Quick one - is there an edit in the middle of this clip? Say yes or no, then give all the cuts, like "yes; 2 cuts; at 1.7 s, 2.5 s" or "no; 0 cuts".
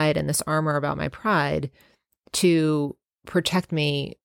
no; 0 cuts